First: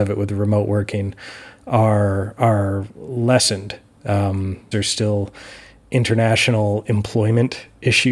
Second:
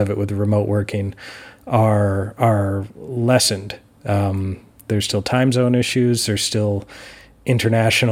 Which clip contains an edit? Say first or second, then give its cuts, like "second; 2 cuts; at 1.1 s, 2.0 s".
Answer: first; 1 cut; at 4.7 s